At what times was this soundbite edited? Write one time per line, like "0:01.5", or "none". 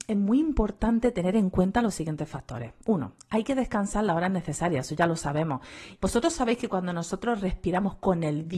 0:06.0